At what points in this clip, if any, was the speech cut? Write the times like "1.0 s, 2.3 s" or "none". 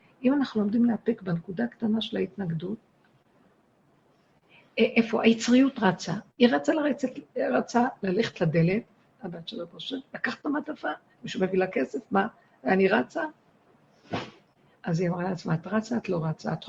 none